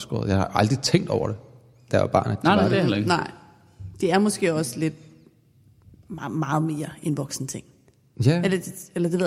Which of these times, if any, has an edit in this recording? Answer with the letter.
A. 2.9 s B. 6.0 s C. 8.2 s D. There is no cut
D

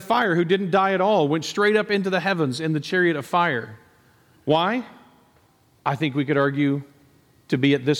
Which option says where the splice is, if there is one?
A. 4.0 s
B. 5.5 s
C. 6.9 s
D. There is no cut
D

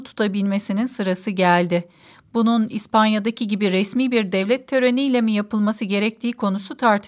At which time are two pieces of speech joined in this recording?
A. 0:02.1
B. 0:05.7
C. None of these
C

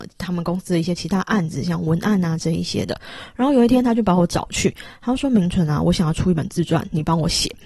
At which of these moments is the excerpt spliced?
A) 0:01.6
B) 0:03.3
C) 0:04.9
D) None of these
D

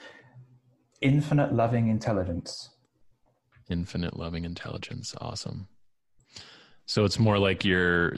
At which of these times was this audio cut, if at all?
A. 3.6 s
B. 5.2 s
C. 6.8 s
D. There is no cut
C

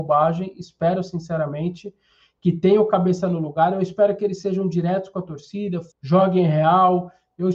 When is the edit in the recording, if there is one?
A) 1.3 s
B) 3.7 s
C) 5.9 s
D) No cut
C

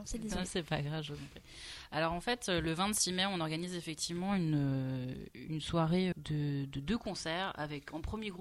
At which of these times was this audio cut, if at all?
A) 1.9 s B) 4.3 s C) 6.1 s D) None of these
C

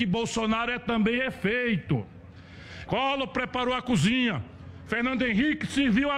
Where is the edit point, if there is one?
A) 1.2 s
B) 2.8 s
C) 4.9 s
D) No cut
B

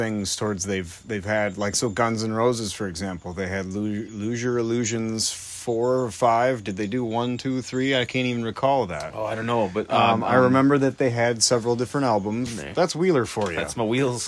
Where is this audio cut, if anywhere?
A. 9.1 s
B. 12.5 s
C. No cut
B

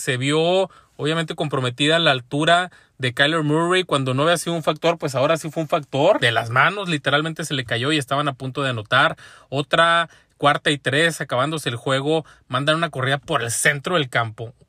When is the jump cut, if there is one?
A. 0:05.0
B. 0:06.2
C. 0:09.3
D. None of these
B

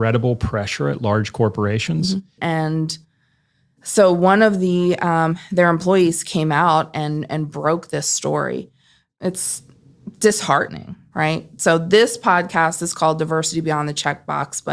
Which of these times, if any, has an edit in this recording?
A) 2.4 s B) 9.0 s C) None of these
A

